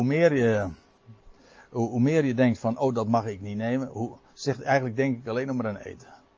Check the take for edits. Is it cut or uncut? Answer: uncut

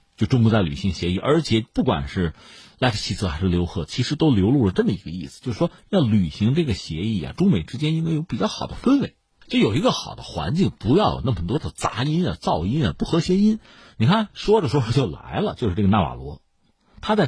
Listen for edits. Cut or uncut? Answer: uncut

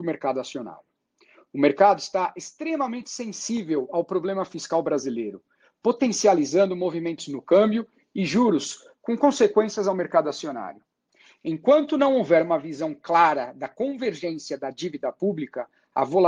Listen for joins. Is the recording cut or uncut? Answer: uncut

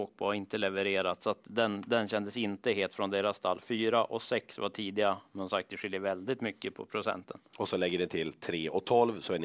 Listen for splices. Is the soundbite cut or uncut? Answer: uncut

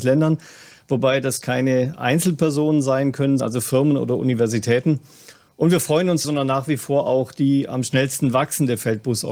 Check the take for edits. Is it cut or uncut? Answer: cut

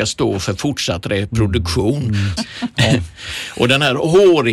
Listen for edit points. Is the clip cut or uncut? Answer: cut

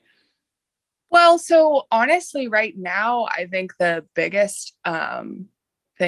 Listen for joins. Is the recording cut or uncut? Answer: uncut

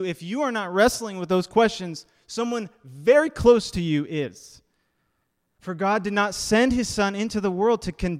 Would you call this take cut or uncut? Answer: cut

